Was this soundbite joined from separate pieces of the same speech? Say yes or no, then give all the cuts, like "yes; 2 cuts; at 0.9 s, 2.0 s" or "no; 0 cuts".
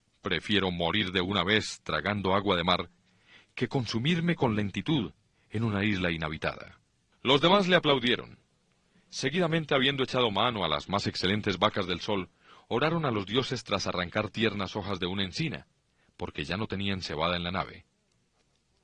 no; 0 cuts